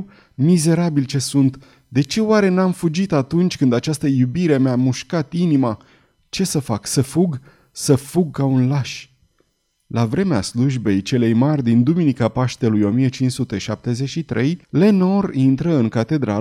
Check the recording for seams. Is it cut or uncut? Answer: cut